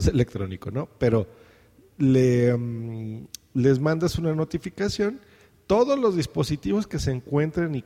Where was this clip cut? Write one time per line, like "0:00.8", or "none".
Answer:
none